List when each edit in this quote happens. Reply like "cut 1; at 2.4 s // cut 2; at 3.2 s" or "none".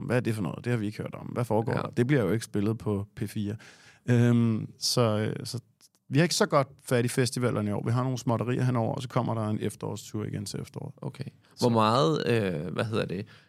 none